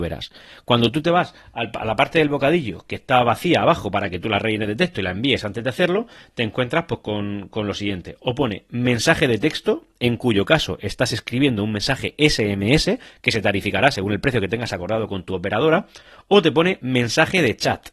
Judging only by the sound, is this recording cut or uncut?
uncut